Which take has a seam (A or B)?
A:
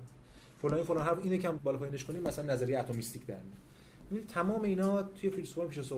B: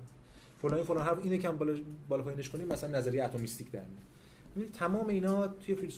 A